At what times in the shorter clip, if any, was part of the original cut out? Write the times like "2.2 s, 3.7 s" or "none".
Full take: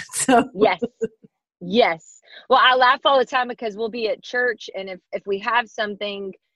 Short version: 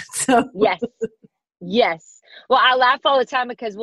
none